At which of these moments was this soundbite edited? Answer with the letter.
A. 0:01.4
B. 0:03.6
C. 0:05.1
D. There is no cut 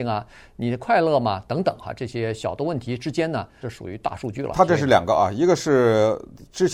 B